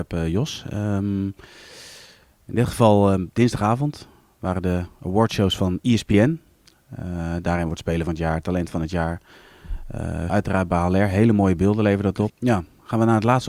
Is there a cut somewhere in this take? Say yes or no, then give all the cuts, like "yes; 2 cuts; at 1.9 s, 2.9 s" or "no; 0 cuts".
yes; 2 cuts; at 10.3 s, 12.3 s